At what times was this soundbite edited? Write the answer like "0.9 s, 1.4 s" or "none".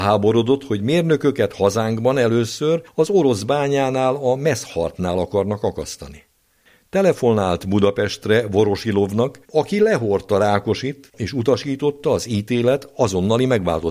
9.4 s

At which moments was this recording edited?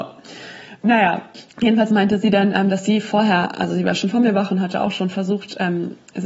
1.5 s

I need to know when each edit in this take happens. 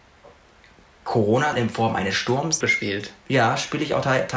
1.5 s, 2.6 s

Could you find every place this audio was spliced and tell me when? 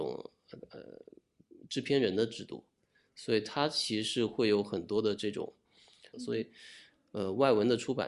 6.1 s

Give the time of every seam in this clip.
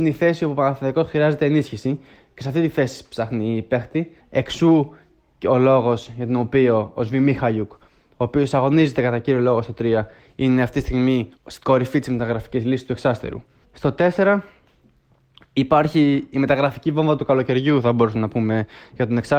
4.2 s, 11.4 s, 13.6 s

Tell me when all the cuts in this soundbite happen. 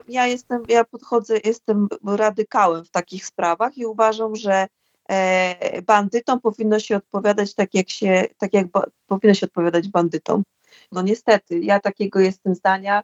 10.9 s

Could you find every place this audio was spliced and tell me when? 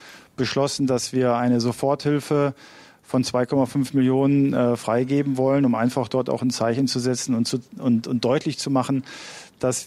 none

